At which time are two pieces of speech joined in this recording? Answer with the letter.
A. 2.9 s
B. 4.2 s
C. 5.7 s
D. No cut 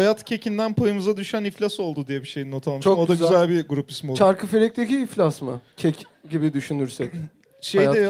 C